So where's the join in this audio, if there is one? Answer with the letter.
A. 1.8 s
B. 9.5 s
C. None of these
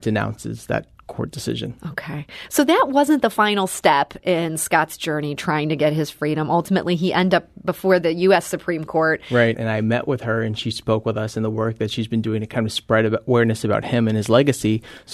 B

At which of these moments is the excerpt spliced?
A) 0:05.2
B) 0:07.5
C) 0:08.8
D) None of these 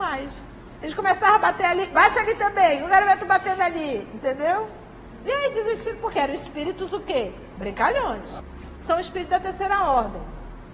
D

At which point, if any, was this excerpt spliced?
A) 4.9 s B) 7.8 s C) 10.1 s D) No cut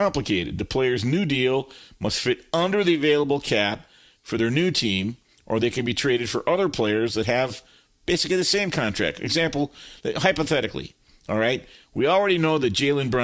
D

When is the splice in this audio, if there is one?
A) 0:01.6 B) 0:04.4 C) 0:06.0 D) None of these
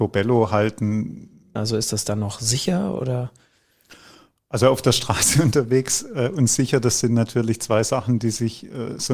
A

